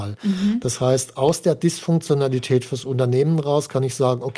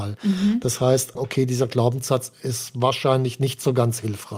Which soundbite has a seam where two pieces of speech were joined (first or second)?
second